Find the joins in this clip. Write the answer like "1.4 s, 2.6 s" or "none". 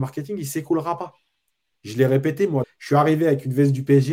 2.6 s